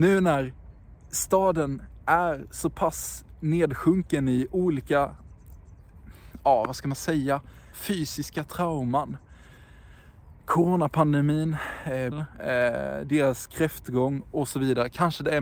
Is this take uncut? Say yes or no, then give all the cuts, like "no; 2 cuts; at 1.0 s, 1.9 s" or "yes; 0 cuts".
no; 2 cuts; at 7.7 s, 12.1 s